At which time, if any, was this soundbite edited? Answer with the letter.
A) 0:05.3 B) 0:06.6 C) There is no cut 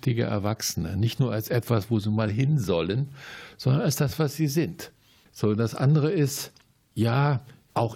A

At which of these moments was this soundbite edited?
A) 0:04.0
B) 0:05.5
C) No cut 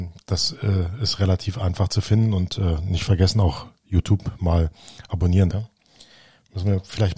B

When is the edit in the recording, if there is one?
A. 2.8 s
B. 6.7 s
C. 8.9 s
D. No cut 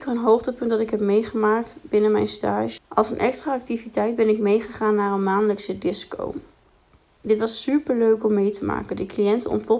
A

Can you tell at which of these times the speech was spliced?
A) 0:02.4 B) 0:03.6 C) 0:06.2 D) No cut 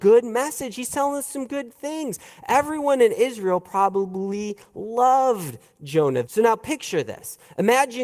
C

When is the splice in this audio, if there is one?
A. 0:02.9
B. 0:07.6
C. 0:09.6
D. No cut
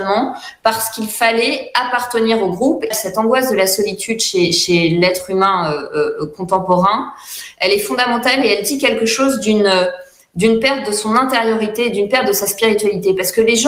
A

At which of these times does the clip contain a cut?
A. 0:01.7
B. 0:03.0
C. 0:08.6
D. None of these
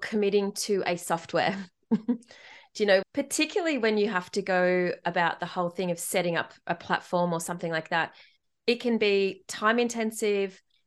B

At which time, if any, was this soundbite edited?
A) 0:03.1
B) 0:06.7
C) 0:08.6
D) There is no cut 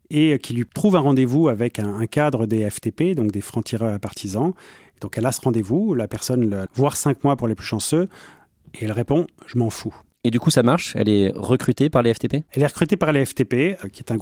B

